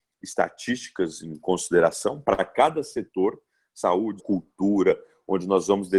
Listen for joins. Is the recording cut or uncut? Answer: cut